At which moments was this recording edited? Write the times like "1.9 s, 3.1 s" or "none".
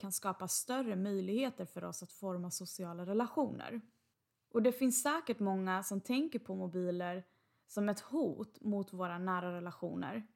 none